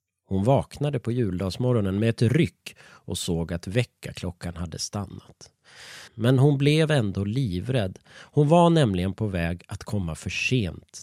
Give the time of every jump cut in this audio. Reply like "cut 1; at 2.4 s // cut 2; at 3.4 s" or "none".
cut 1; at 6.1 s

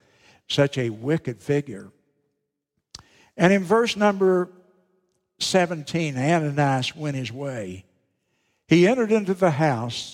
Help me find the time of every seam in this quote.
none

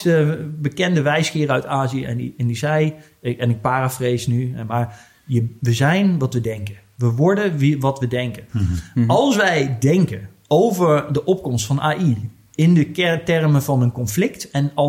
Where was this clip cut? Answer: none

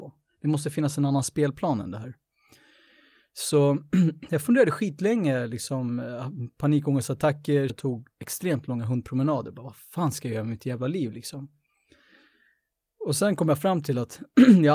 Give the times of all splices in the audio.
cut 1; at 7.7 s

